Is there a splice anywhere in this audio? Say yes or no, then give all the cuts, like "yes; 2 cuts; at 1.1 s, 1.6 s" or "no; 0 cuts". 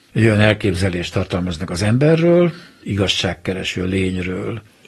yes; 1 cut; at 2.8 s